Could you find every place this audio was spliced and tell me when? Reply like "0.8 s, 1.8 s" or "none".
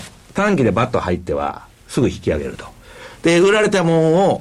none